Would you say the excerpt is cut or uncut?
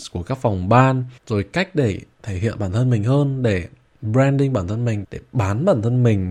cut